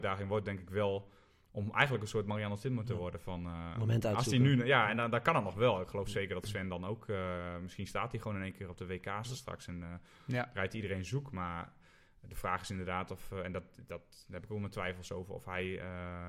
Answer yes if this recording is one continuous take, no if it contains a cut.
yes